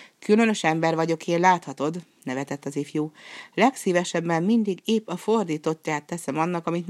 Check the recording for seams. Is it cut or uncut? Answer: uncut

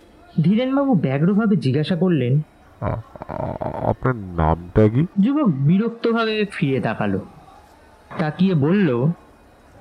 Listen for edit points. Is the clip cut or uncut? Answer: cut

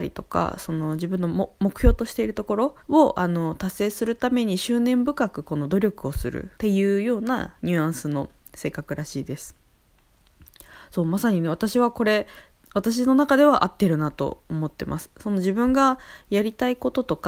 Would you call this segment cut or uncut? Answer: cut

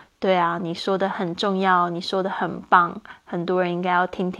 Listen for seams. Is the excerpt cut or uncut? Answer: uncut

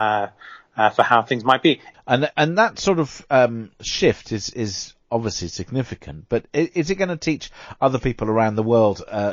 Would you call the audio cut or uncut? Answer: cut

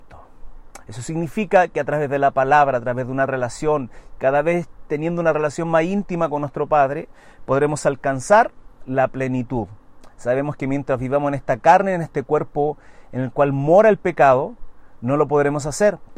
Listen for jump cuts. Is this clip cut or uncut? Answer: uncut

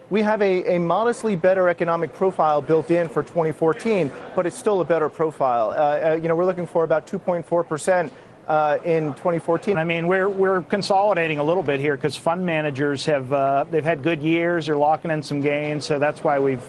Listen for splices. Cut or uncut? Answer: cut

